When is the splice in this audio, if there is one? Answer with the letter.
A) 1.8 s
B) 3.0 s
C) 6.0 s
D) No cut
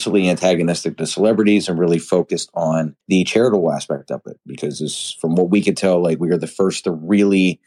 B